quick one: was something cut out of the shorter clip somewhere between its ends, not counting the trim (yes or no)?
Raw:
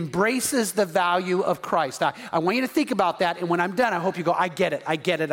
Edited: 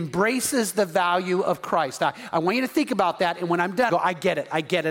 yes